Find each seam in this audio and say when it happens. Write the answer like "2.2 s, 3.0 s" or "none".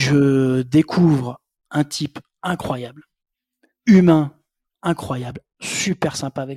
5.5 s